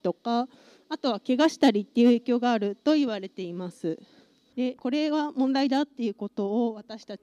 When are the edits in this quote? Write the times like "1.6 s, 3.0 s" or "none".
4.5 s